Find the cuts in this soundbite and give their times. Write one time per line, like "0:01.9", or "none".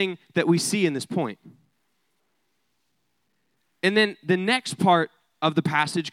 none